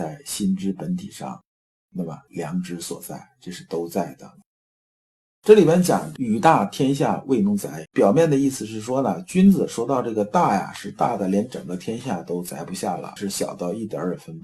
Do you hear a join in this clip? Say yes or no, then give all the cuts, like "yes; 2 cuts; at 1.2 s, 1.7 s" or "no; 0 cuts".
yes; 2 cuts; at 7.9 s, 13.2 s